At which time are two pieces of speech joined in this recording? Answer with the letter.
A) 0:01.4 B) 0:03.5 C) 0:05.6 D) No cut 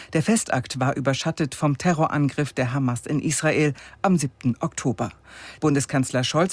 C